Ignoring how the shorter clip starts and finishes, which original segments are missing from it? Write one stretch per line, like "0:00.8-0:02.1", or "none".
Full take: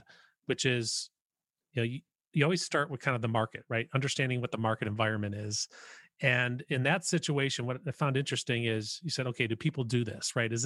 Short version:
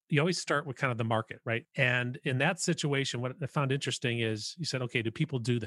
0:03.9-0:06.1

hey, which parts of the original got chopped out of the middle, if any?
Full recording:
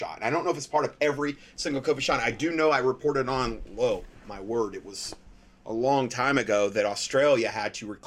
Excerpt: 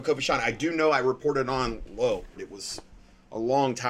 0:04.2-0:04.7

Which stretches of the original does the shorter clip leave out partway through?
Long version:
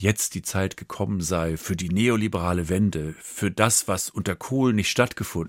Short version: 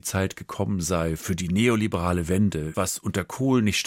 0:03.1-0:03.9

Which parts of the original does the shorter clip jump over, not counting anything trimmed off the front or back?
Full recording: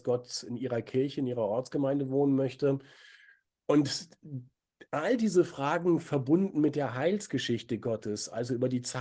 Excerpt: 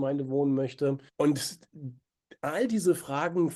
0:02.9-0:03.6

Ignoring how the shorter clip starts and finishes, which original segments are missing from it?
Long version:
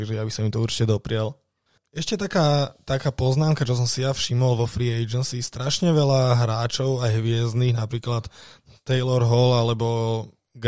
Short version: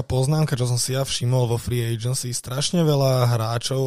none

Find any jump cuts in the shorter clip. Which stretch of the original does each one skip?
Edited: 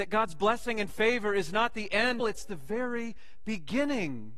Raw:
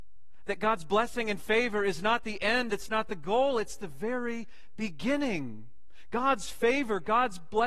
0:02.7-0:03.5

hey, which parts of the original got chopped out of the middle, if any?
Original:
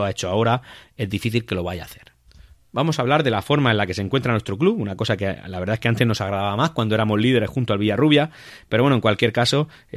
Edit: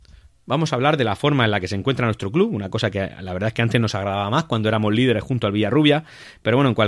none

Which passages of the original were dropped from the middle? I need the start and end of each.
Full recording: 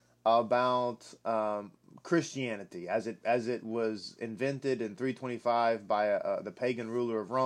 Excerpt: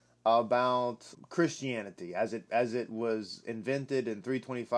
0:01.1-0:01.9

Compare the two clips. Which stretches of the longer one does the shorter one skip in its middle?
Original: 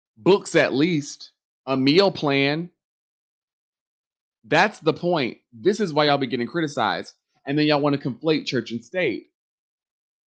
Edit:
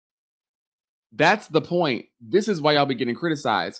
none

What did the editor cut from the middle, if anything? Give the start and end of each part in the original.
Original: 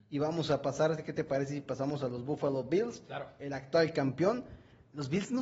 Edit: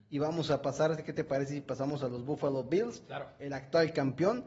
none

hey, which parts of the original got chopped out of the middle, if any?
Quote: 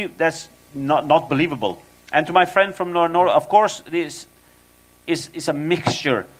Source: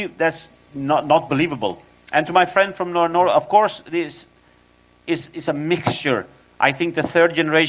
none

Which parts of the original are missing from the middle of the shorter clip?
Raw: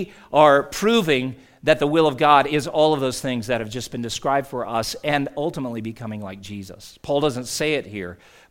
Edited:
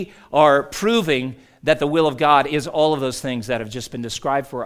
none

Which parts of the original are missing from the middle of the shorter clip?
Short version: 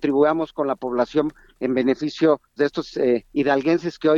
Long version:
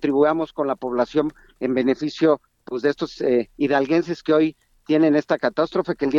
0:02.6-0:02.8

